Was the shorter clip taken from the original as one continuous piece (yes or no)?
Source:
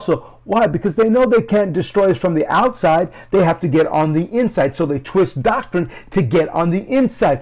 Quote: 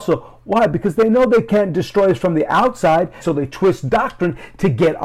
no